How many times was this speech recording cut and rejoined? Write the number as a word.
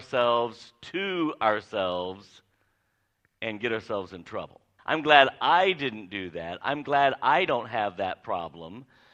one